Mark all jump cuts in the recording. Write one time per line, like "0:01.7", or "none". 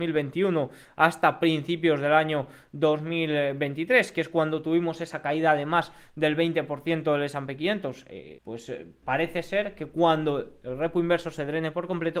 0:08.4